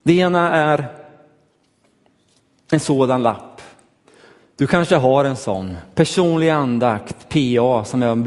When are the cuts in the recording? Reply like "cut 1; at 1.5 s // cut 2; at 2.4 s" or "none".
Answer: none